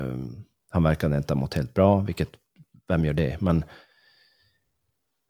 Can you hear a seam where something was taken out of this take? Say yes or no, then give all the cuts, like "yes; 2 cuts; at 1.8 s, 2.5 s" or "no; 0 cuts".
no; 0 cuts